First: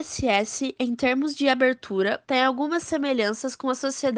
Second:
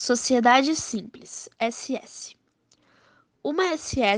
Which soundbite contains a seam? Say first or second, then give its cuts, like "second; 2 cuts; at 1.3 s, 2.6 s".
first; 1 cut; at 2.2 s